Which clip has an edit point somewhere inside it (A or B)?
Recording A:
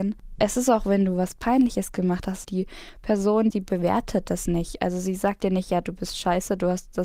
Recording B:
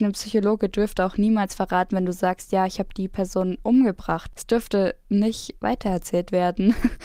A